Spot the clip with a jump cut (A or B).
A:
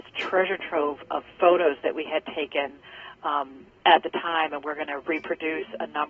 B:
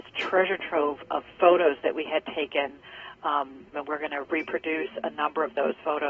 B